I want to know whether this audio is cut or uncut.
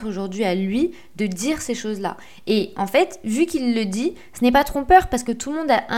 uncut